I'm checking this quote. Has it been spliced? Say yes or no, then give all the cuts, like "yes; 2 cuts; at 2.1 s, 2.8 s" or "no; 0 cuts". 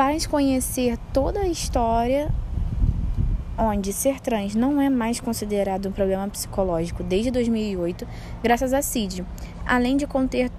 yes; 1 cut; at 9.6 s